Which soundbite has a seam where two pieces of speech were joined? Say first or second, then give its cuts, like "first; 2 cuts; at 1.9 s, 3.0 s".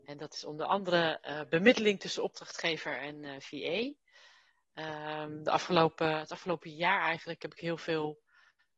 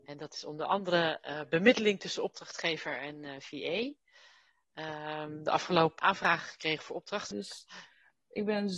second; 2 cuts; at 6.0 s, 7.3 s